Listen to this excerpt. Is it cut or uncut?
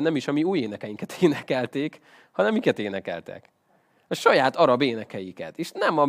uncut